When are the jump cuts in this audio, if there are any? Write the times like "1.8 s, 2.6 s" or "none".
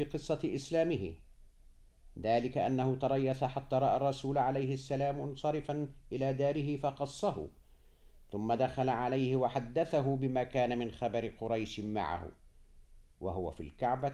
13.1 s